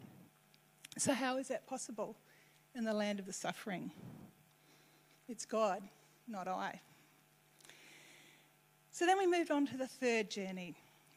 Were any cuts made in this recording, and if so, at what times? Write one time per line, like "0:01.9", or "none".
none